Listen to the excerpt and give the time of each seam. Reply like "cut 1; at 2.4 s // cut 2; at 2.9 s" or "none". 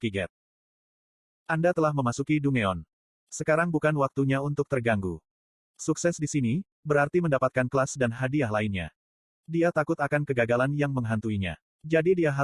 cut 1; at 3.1 s

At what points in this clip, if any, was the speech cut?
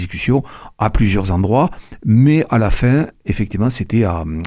none

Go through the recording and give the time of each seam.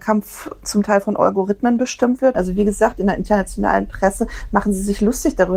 cut 1; at 2.3 s

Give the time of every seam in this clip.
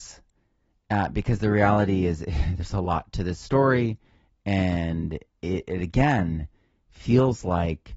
none

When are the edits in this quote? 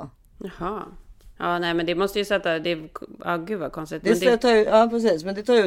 none

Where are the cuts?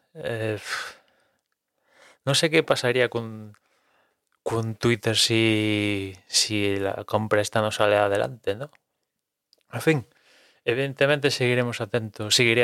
none

